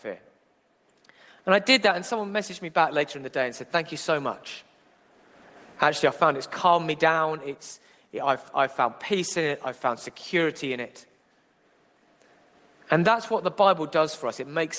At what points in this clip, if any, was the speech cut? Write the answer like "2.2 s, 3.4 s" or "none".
none